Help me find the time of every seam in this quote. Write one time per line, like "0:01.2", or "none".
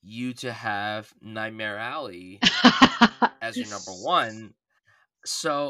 none